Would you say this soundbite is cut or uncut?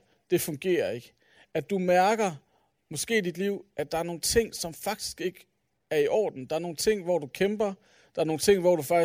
uncut